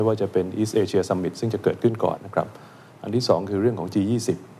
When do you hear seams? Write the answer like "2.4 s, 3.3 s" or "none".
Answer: 2.2 s